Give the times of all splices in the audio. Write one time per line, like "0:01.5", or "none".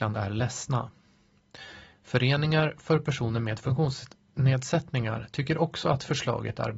0:01.9